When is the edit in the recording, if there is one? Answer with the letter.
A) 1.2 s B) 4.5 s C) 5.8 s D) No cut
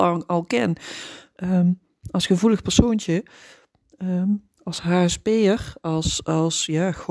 D